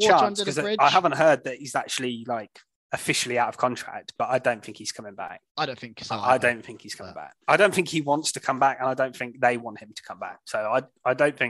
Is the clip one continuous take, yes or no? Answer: no